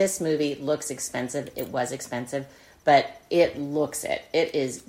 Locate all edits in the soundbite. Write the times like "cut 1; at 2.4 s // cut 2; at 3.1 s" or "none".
none